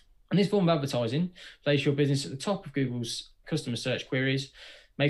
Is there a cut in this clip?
yes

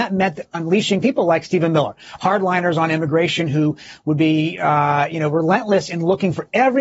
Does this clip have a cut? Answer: no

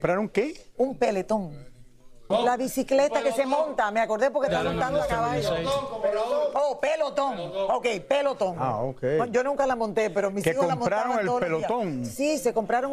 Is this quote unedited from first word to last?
no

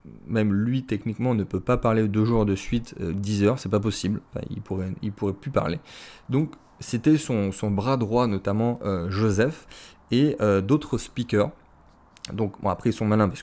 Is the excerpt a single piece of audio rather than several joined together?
yes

